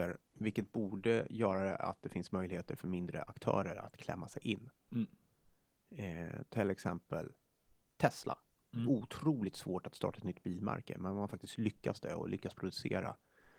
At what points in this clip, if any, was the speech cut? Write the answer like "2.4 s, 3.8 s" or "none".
8.6 s

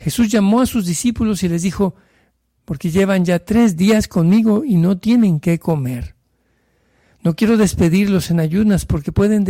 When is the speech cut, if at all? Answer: 2.6 s

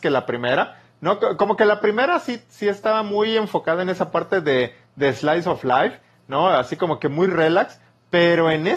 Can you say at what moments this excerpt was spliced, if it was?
none

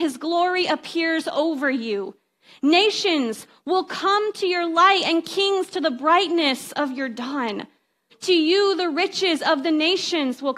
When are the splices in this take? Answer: 8.1 s

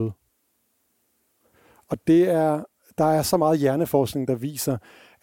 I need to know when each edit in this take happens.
none

